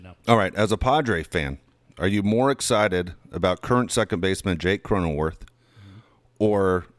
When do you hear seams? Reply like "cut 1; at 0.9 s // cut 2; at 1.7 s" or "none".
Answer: none